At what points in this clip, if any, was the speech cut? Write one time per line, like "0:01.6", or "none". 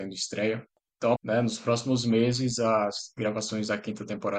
0:01.2